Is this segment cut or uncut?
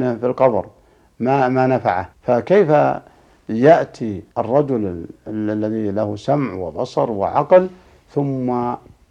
cut